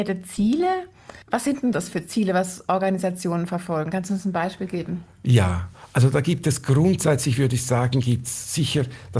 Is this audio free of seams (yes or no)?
no